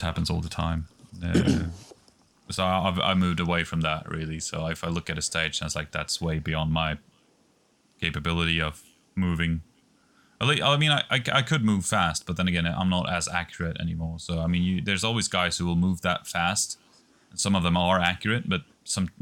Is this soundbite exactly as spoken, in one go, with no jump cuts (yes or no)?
yes